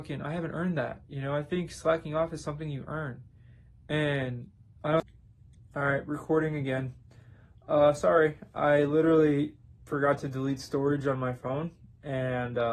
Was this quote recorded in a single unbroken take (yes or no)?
yes